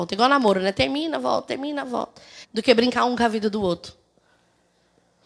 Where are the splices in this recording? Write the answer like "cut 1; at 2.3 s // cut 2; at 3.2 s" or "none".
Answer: cut 1; at 2.4 s